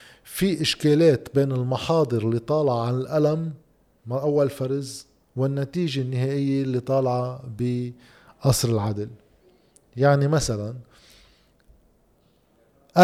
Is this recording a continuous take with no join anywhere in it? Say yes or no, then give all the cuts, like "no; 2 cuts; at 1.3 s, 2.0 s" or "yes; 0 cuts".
yes; 0 cuts